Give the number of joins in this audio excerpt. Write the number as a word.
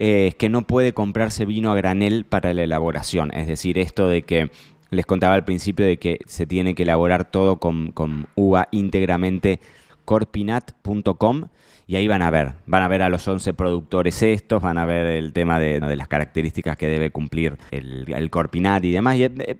three